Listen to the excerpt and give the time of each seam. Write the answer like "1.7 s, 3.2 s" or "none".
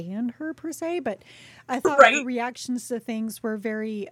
none